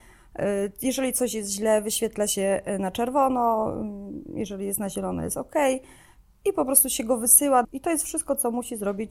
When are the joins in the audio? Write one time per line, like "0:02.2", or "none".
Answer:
0:07.6